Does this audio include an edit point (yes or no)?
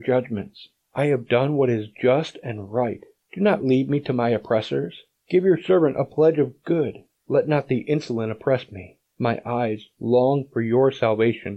no